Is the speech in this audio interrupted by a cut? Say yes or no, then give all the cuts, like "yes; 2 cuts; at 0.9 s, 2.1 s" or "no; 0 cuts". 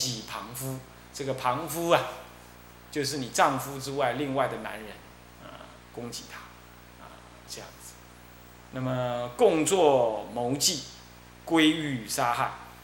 no; 0 cuts